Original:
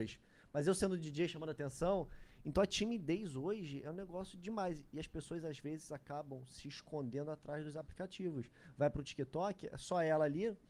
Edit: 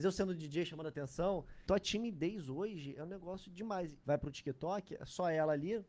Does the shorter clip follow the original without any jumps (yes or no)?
no